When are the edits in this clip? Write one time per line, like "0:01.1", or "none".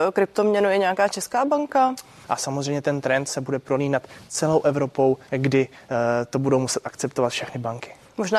0:02.2
0:05.3